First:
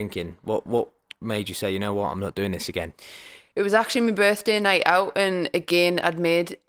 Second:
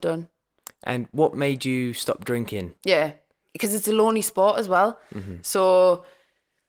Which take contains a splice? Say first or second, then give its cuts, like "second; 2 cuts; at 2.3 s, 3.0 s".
second; 1 cut; at 2.8 s